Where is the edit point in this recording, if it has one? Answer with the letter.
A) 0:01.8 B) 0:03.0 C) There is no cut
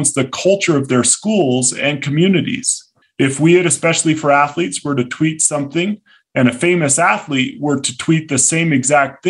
B